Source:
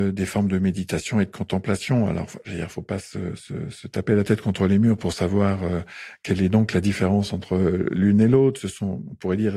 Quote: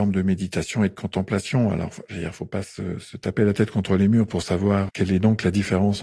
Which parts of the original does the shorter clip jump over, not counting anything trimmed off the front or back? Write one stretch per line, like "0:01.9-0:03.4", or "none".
0:03.4-0:03.7
0:05.6-0:06.2